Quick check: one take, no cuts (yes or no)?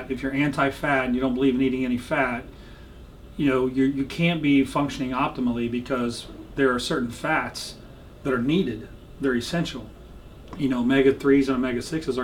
yes